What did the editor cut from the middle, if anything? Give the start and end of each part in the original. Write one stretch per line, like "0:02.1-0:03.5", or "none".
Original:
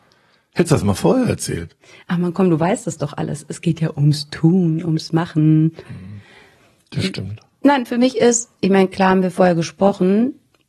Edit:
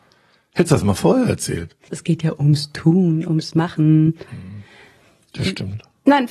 0:01.9-0:03.5